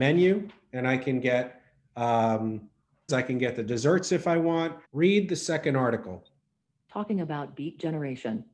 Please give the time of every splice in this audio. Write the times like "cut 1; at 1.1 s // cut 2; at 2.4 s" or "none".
cut 1; at 3.1 s // cut 2; at 4.8 s